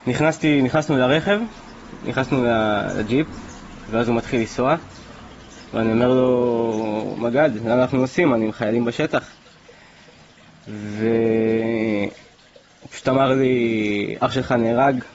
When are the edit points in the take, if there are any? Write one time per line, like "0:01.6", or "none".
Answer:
none